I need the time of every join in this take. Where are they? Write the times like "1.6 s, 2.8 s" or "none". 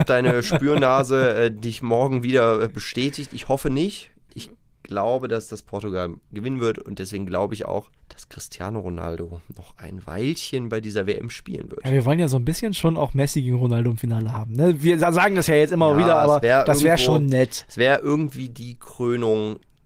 8.0 s